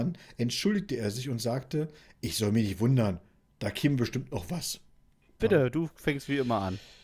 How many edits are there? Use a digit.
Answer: 1